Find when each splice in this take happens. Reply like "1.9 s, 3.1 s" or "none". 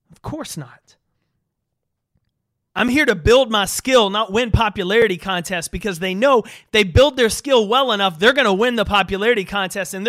2.7 s